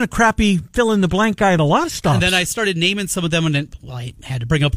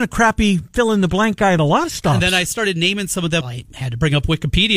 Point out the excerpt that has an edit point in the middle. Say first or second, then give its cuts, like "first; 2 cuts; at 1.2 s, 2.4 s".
second; 1 cut; at 3.4 s